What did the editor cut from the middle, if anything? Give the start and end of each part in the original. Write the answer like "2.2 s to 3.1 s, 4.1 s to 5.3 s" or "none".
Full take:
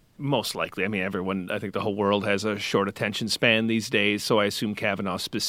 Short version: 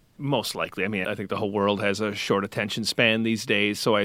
1.0 s to 1.5 s

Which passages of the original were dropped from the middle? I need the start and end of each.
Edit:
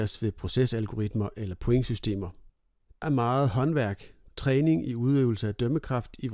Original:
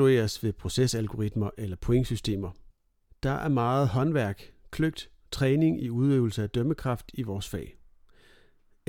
3.2 s to 3.4 s, 4.7 s to 5.2 s

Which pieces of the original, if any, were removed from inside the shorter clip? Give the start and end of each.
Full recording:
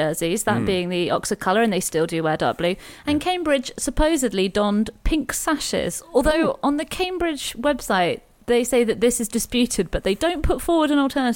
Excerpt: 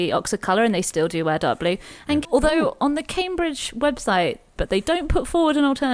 3.2 s to 6.1 s, 8.4 s to 9.9 s

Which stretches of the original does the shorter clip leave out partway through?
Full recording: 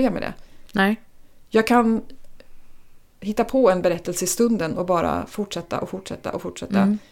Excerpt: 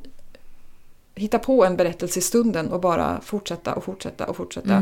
none

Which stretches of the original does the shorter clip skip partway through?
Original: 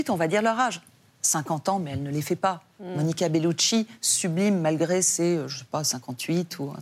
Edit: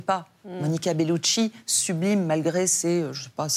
none

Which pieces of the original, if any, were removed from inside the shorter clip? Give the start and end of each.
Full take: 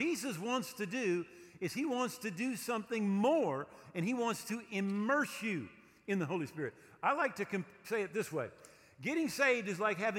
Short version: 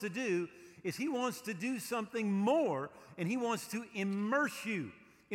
none

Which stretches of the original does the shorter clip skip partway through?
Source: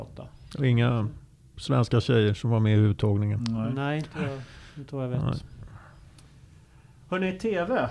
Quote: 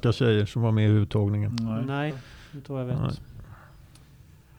4.0 s to 4.3 s

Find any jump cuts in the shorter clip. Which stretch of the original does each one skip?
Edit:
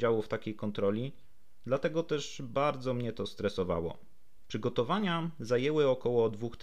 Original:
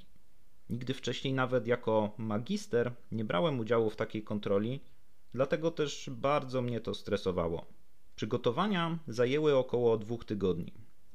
none

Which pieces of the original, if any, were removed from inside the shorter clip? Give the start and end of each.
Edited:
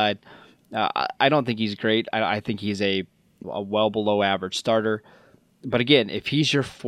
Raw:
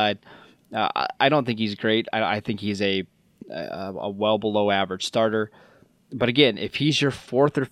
3.4 s to 3.9 s

